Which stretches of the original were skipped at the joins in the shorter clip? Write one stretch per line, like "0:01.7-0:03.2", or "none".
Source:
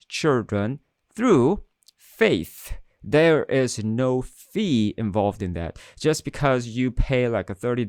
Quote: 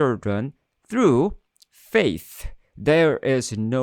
none